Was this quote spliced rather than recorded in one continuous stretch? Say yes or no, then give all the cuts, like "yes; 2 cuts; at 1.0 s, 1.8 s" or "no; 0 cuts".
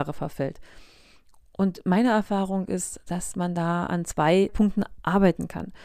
no; 0 cuts